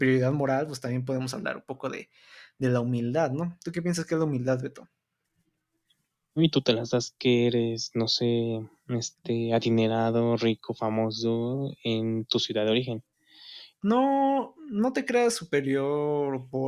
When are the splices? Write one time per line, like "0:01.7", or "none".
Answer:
0:06.4
0:13.7